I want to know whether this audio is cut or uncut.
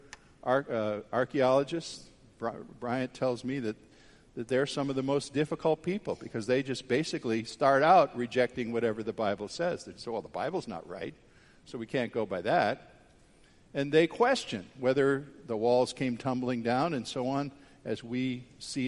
uncut